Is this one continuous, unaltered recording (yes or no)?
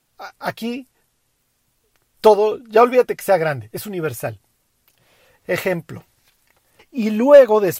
no